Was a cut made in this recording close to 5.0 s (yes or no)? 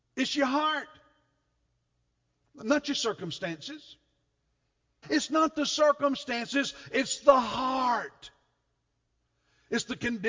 yes